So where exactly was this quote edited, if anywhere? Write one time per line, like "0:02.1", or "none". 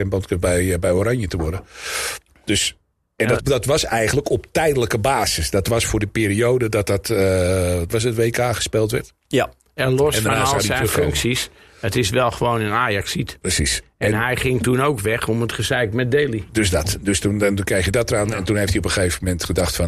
0:03.4